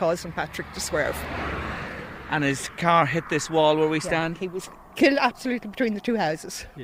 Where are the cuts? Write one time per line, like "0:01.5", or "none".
none